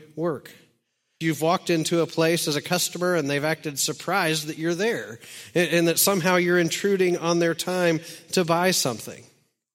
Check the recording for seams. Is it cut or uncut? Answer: cut